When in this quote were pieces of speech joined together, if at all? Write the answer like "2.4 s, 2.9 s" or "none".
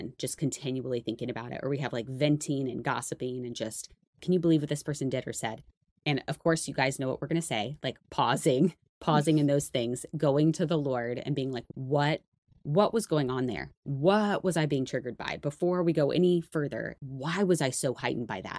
none